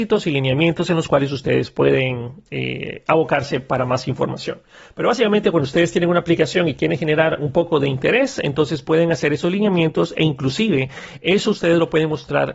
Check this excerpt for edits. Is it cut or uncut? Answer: uncut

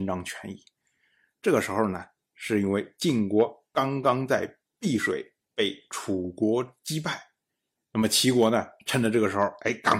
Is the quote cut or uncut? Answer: uncut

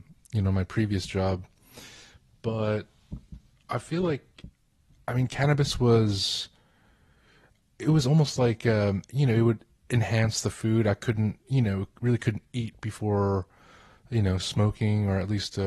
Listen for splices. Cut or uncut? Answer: uncut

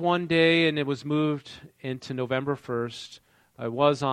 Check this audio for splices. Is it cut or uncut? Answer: uncut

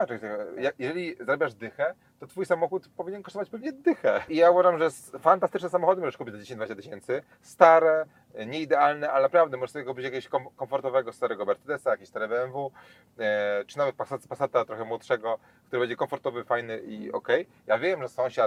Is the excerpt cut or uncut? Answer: cut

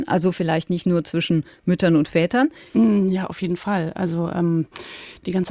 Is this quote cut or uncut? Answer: cut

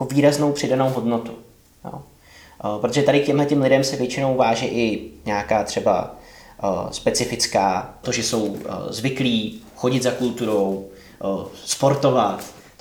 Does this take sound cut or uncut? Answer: cut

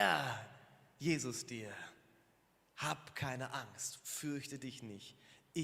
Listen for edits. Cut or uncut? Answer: uncut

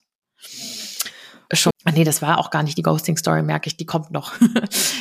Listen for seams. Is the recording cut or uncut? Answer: cut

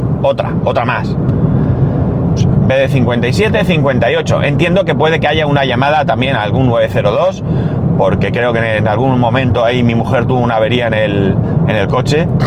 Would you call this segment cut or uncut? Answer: cut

